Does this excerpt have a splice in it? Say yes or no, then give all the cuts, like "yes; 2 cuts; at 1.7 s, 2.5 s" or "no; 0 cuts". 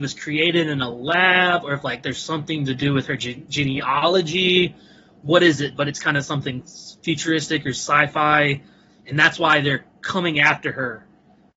no; 0 cuts